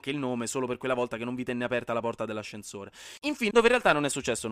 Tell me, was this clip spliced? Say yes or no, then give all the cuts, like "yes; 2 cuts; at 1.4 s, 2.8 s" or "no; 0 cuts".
yes; 1 cut; at 3.5 s